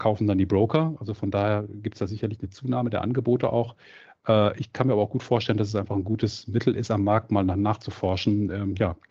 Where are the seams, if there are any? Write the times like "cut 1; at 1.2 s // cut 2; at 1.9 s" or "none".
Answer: none